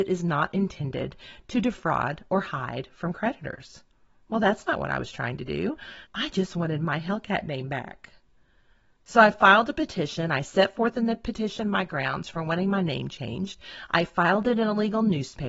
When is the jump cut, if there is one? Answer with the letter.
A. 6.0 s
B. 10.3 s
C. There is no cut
A